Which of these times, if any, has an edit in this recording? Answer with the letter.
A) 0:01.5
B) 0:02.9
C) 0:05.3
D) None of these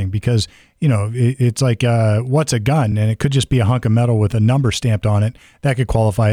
D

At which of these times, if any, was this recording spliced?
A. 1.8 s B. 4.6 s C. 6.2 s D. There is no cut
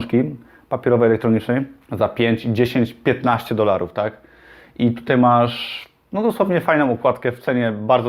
A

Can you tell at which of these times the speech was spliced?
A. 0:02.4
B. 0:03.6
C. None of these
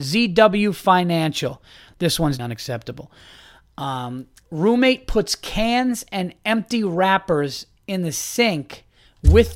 A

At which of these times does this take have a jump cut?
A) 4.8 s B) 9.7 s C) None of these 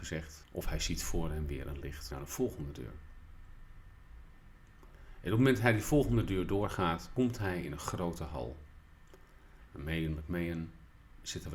B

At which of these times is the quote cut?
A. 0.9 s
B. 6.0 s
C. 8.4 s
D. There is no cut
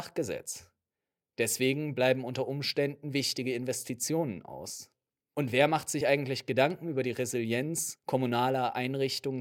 D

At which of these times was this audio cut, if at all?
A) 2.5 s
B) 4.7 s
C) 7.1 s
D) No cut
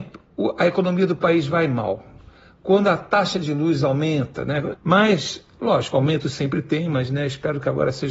B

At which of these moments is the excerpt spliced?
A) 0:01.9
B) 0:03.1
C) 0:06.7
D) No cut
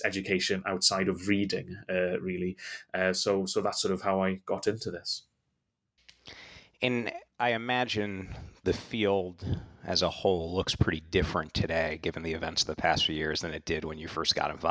D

